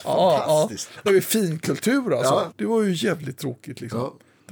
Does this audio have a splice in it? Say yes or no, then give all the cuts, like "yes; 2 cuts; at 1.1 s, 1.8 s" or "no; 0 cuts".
yes; 2 cuts; at 1.1 s, 2.5 s